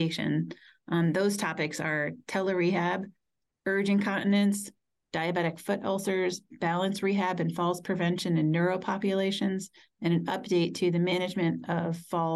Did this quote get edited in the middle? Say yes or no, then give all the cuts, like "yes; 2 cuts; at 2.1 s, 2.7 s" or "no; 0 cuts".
no; 0 cuts